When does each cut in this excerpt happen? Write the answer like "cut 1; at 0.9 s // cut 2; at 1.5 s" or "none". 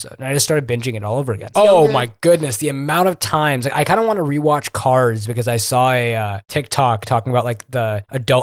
cut 1; at 1.5 s